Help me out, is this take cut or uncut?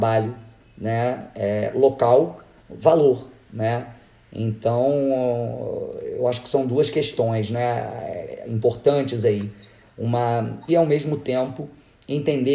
cut